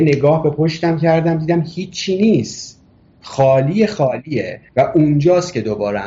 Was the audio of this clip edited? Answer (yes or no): yes